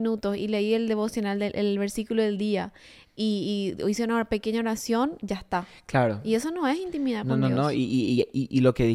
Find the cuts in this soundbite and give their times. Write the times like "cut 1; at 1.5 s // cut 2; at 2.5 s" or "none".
none